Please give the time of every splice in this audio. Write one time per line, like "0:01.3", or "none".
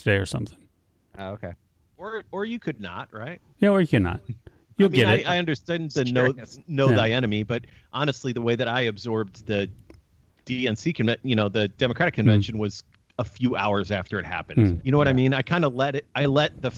0:14.8